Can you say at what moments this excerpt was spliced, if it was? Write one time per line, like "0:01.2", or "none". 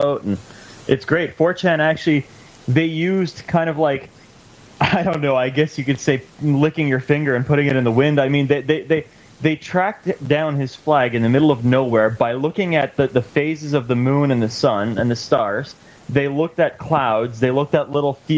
none